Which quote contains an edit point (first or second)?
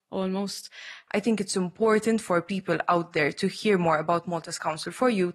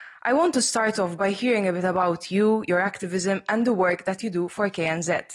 first